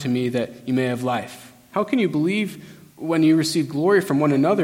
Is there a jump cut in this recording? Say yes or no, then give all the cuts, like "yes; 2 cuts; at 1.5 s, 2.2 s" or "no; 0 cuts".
yes; 2 cuts; at 1.7 s, 2.9 s